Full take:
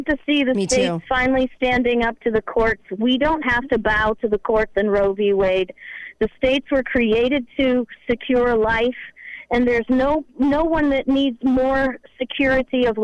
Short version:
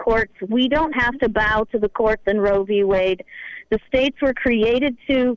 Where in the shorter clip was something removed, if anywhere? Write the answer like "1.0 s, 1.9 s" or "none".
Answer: none